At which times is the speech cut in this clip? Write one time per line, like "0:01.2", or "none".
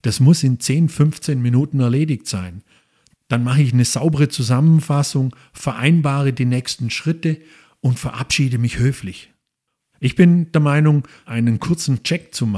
0:03.1
0:09.9
0:11.2